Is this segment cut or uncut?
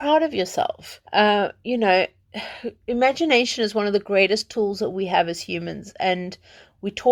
cut